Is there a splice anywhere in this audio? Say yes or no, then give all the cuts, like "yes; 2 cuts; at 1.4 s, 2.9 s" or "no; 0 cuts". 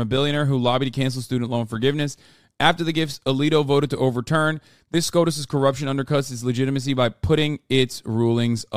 no; 0 cuts